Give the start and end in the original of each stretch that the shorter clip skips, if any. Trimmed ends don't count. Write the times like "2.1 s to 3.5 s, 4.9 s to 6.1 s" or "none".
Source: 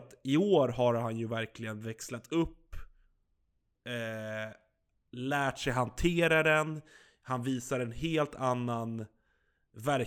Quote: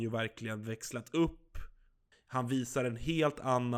3.3 s to 7.1 s